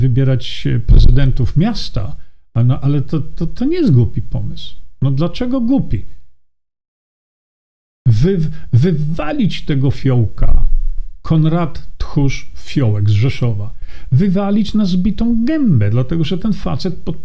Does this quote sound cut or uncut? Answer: uncut